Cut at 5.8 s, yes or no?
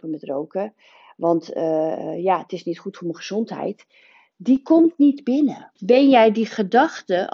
yes